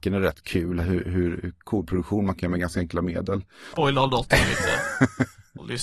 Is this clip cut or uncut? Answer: cut